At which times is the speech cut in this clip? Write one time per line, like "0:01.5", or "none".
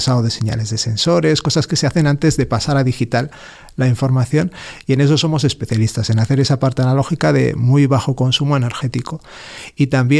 none